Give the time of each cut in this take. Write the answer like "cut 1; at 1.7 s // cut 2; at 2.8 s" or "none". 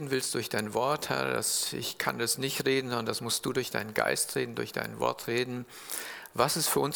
none